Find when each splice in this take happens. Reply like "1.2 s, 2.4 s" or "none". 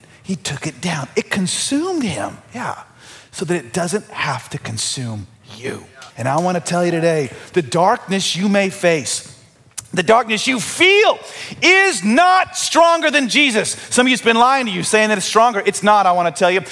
6.1 s